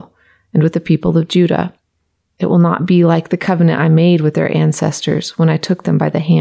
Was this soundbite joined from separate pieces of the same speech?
no; 0 cuts

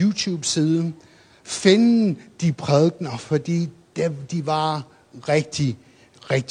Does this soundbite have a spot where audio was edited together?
no; 0 cuts

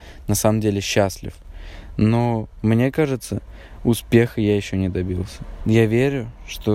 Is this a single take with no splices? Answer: yes; 0 cuts

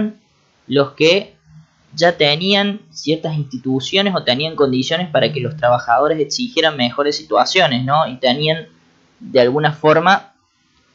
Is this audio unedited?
yes; 0 cuts

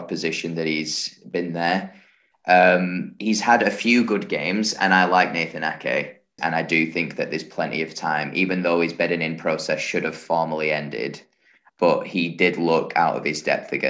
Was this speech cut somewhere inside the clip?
yes; 3 cuts; at 2.3 s, 6.4 s, 11.7 s

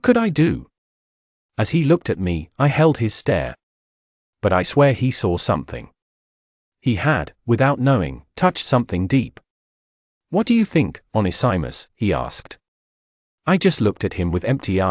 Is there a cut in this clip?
no; 0 cuts

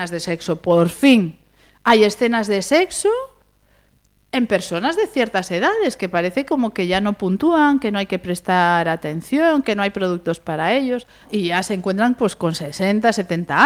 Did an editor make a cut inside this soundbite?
yes; 1 cut; at 11.2 s

